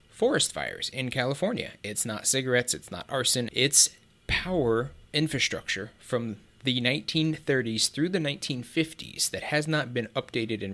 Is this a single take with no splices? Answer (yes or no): no